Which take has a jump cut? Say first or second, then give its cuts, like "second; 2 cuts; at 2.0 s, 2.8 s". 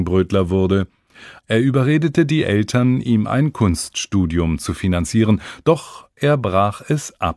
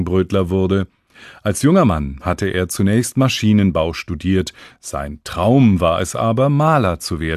first; 1 cut; at 1.4 s